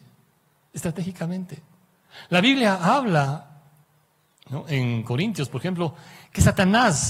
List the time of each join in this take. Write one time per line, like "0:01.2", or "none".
none